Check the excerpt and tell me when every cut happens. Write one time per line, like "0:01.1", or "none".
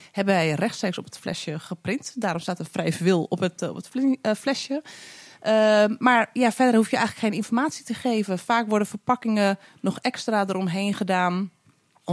none

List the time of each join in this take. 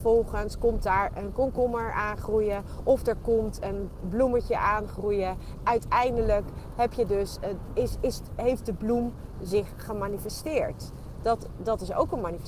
0:05.6

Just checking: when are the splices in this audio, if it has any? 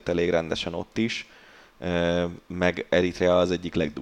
none

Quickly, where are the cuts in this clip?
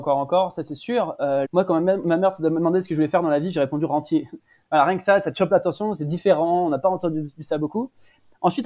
0:01.4

